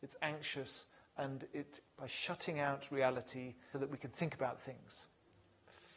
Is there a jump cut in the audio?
yes; 2 cuts; at 1.8 s, 3.7 s

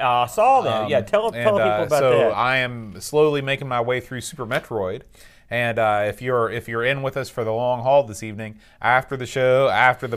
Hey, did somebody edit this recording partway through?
yes; 1 cut; at 2.3 s

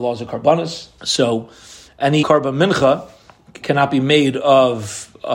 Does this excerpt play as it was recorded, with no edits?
no; 3 cuts; at 1.0 s, 2.2 s, 3.6 s

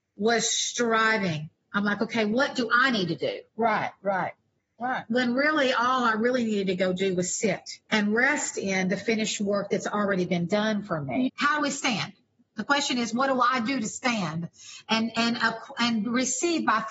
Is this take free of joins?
no; 2 cuts; at 7.9 s, 11.3 s

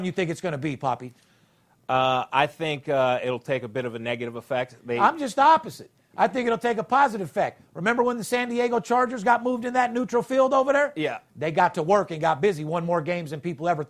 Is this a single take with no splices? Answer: yes; 0 cuts

